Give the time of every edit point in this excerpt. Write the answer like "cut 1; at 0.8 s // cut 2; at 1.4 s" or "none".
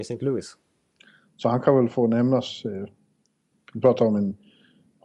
cut 1; at 3.5 s